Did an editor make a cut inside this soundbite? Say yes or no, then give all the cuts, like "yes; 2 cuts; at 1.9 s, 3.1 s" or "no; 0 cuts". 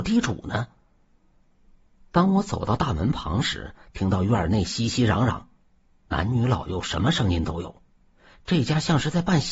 no; 0 cuts